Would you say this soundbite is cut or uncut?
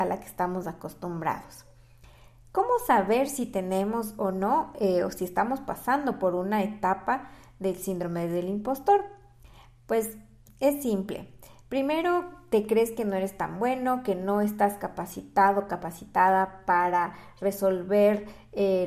uncut